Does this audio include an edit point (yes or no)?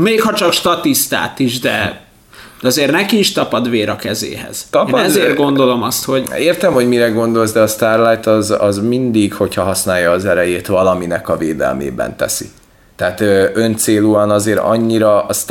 no